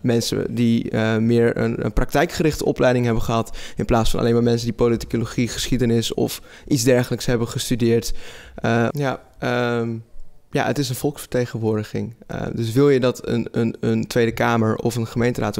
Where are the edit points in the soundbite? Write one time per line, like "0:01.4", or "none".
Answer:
0:06.1
0:08.9